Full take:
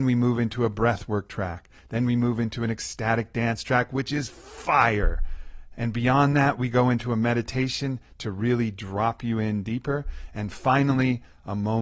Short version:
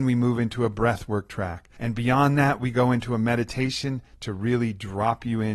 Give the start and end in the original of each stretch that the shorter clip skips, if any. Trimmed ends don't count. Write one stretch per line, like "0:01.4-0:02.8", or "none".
0:01.8-0:05.7